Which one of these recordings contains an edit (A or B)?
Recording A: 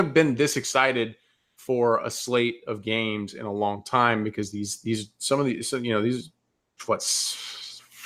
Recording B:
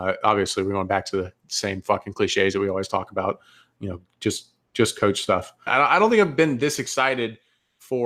B